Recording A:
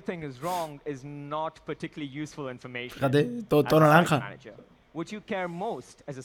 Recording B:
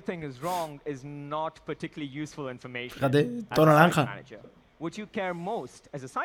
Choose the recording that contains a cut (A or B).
B